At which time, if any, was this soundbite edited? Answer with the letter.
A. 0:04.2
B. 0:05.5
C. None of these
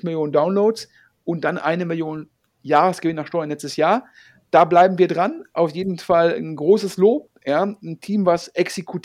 C